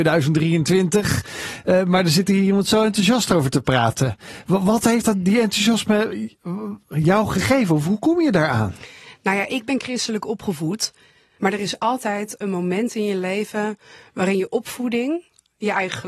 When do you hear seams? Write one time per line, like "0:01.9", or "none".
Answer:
0:11.4

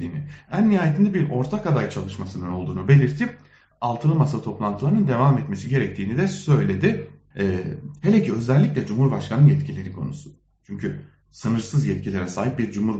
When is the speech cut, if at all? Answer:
0:07.3

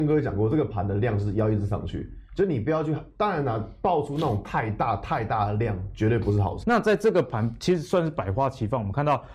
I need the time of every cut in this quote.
0:06.6

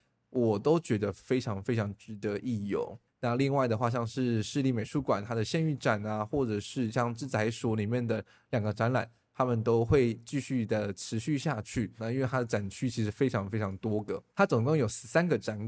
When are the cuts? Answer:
0:12.0
0:14.3

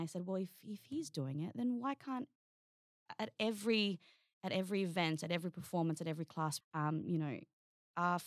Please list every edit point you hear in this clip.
0:06.6

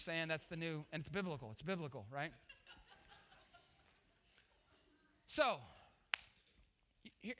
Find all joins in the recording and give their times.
none

